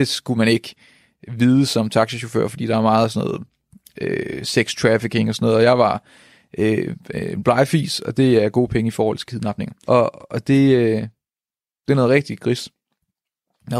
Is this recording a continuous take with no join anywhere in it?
no; 1 cut; at 9.9 s

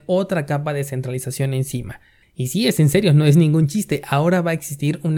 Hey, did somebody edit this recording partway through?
yes; 1 cut; at 2.2 s

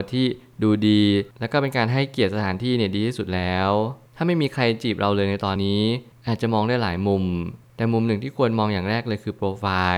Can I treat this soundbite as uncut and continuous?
no; 1 cut; at 5.6 s

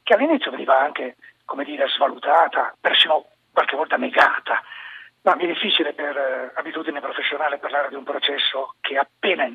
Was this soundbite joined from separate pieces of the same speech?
yes; 1 cut; at 5.2 s

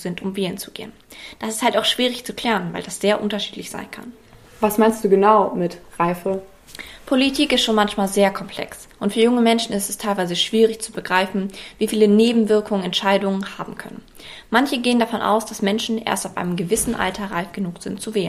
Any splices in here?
no; 0 cuts

